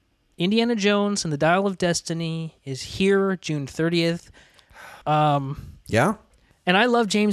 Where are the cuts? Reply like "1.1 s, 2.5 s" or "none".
5.0 s